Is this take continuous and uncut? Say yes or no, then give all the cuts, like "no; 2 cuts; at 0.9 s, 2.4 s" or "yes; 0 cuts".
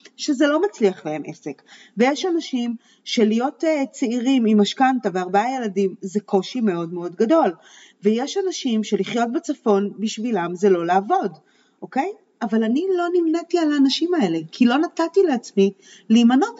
yes; 0 cuts